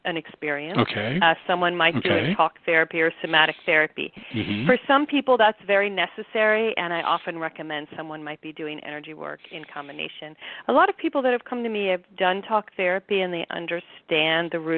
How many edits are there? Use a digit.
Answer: 0